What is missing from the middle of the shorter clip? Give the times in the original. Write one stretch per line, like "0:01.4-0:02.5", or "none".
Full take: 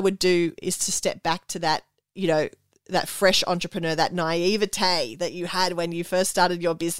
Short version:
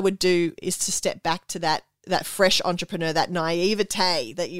0:02.0-0:02.8